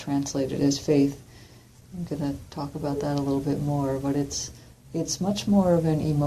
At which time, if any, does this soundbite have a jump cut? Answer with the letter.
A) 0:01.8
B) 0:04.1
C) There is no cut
A